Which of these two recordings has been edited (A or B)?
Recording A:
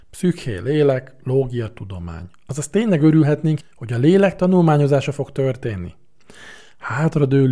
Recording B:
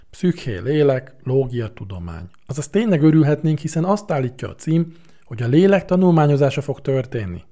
A